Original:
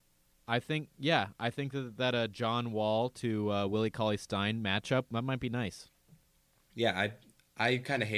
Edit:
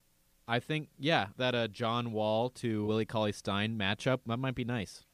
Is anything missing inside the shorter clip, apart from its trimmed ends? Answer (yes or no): yes